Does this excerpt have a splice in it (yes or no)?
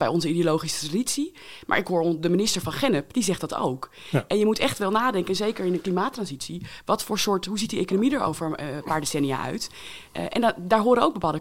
no